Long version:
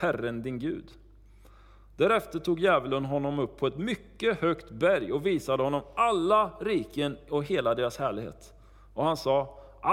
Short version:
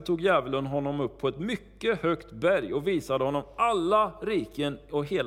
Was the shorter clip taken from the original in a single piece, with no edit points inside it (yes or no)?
yes